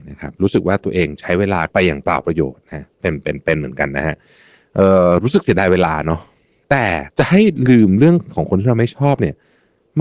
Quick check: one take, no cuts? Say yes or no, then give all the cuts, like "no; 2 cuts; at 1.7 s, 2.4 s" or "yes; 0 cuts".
yes; 0 cuts